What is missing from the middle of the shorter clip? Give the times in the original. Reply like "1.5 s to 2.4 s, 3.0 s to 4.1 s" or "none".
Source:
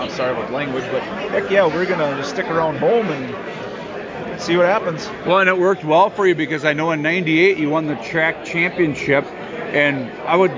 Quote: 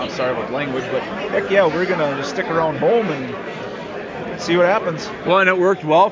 none